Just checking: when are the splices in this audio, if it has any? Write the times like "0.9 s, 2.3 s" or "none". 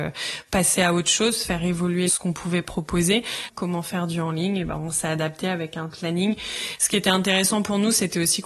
3.5 s